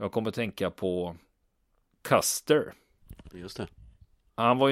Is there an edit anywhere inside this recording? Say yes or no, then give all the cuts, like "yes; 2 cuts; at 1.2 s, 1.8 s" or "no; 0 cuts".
no; 0 cuts